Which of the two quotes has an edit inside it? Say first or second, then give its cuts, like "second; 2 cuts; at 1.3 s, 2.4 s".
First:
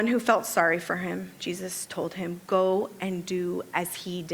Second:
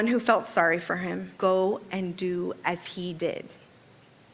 second; 1 cut; at 1.4 s